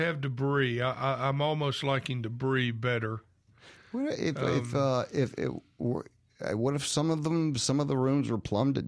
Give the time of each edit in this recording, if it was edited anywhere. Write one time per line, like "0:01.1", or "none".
none